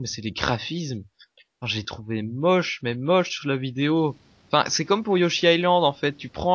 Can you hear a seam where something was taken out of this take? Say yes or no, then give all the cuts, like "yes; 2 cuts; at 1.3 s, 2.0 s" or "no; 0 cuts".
no; 0 cuts